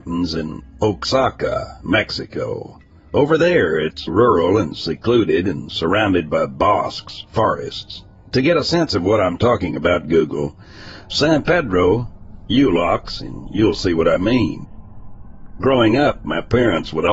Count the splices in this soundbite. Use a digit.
1